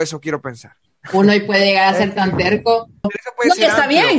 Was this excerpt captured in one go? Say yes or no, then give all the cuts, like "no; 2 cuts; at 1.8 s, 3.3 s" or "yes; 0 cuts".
no; 1 cut; at 3.0 s